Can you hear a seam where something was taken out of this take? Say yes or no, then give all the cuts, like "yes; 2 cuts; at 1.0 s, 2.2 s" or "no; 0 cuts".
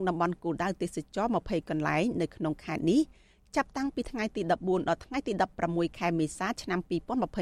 no; 0 cuts